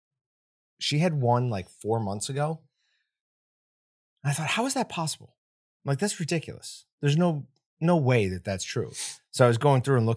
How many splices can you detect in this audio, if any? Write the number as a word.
zero